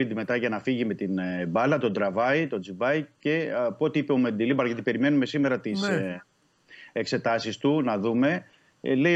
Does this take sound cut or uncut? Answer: uncut